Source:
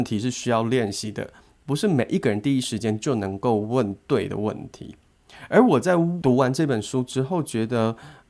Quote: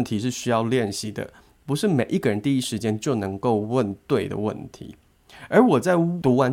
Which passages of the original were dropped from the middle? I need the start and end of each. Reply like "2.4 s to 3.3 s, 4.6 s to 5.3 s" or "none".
none